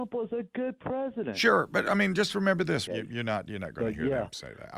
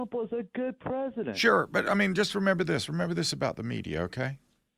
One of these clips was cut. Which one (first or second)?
first